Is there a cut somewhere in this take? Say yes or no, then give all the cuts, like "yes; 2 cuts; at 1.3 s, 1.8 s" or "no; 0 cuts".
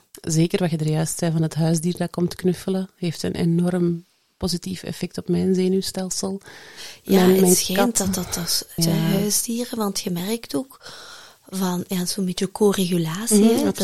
yes; 1 cut; at 8.8 s